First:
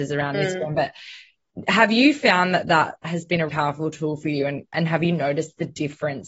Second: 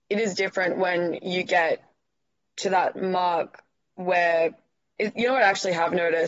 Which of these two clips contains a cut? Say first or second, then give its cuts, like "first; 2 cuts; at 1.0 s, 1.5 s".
first; 1 cut; at 3.5 s